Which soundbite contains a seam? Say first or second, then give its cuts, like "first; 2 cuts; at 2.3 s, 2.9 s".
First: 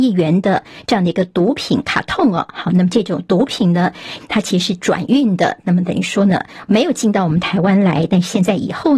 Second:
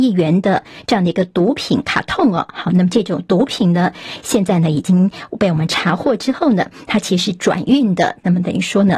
first; 1 cut; at 4.2 s